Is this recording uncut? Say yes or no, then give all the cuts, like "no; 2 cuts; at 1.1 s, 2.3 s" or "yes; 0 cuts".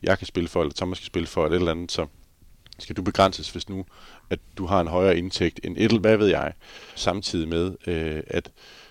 no; 1 cut; at 7.0 s